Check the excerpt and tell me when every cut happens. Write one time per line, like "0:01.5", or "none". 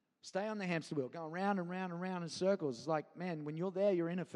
none